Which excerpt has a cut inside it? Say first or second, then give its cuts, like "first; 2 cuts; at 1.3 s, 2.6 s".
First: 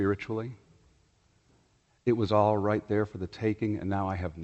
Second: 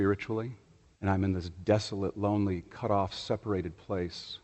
second; 1 cut; at 1.0 s